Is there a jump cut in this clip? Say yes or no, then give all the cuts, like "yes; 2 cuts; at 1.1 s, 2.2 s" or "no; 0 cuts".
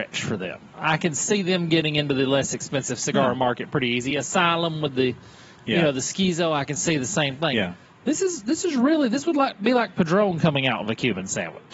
no; 0 cuts